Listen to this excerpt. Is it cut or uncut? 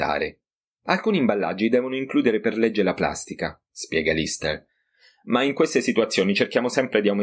cut